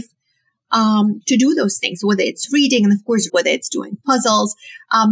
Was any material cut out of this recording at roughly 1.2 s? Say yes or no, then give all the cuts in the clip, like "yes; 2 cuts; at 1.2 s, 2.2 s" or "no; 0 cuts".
no; 1 cut; at 3.3 s